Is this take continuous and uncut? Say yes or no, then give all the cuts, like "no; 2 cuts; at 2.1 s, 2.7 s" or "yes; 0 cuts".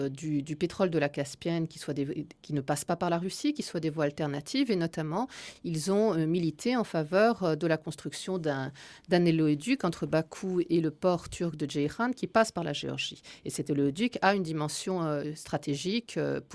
yes; 0 cuts